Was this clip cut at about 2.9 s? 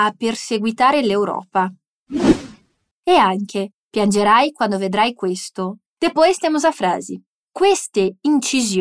yes; 2 cuts; at 2.9 s, 5.9 s

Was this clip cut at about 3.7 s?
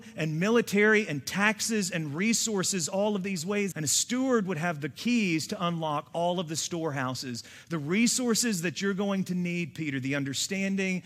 yes; 1 cut; at 3.7 s

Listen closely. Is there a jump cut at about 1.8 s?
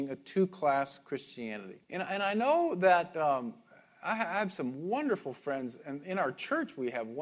yes; 1 cut; at 1.8 s

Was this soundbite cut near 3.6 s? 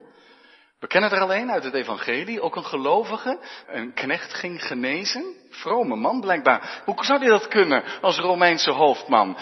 yes; 2 cuts; at 3.6 s, 6.8 s

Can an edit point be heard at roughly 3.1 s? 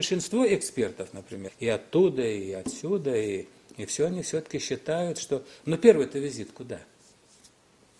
no; 1 cut; at 1.5 s

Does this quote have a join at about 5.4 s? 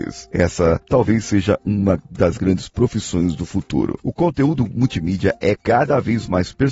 no; 1 cut; at 4.0 s

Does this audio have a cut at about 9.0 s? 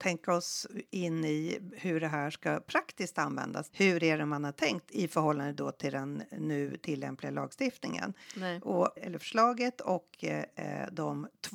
yes; 2 cuts; at 3.7 s, 9.0 s

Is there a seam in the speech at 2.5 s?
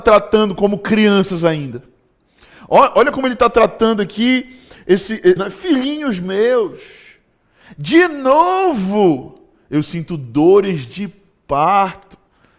no; 1 cut; at 5.4 s

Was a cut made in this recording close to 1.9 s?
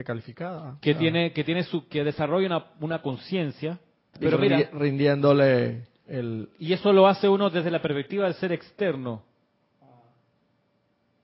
no; 1 cut; at 4.1 s

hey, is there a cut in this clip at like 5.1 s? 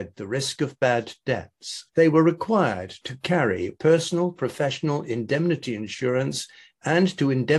no; 1 cut; at 1.9 s

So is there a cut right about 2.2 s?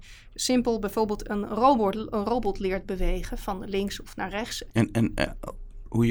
no; 1 cut; at 4.7 s

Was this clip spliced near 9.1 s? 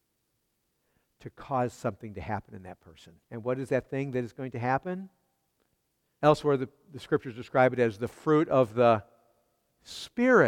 no; 2 cuts; at 3.2 s, 6.2 s

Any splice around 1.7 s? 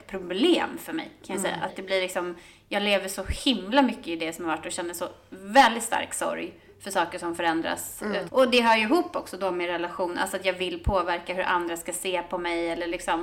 yes; 2 cuts; at 1.7 s, 8.3 s

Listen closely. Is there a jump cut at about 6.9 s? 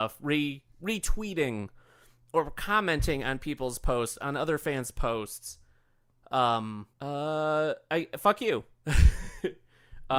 yes; 1 cut; at 6.9 s

